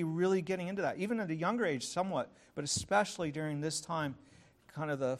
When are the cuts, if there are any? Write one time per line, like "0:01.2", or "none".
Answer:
none